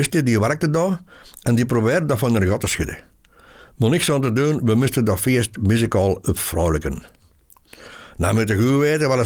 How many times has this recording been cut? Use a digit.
0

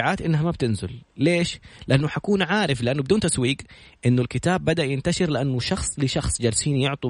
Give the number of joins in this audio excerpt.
0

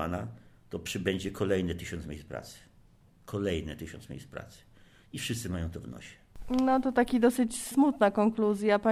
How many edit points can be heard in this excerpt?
0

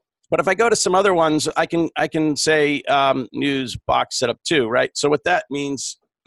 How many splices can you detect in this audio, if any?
1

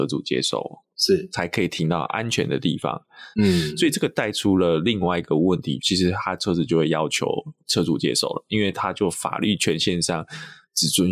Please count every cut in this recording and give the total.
2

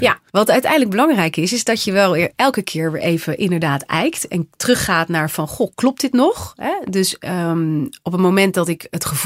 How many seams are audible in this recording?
0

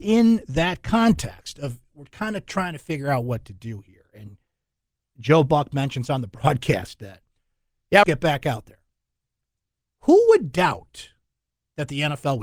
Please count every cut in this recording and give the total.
1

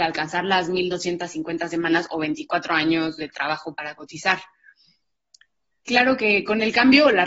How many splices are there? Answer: 0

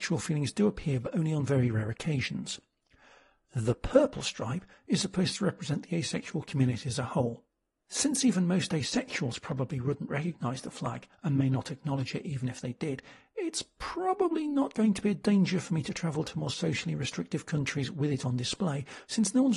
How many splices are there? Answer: 1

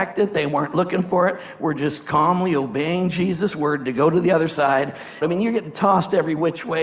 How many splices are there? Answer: 1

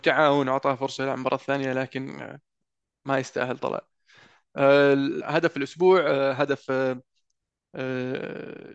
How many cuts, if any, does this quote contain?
1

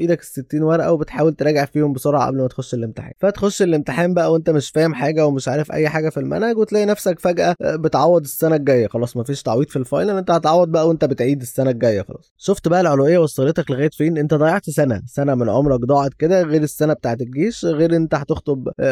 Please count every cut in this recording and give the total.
0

